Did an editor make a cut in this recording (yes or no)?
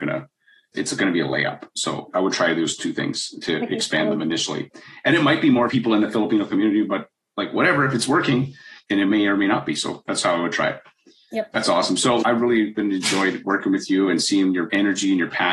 yes